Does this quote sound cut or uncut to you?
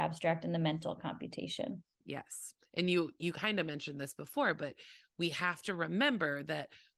cut